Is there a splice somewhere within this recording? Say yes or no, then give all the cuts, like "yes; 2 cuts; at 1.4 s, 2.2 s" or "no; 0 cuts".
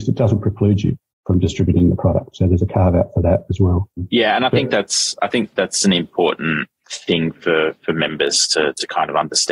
no; 0 cuts